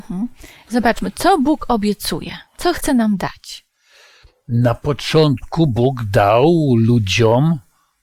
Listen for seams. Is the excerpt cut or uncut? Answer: cut